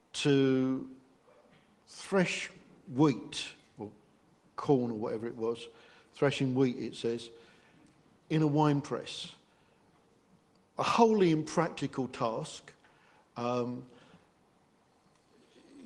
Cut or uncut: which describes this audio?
uncut